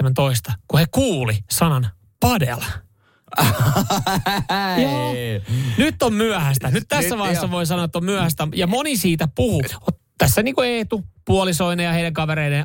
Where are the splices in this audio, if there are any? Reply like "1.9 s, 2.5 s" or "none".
9.7 s